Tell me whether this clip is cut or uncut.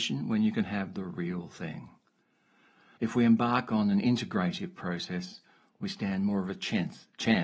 cut